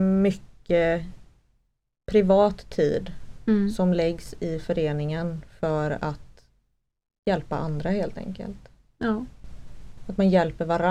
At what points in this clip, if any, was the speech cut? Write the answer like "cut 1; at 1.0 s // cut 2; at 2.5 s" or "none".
none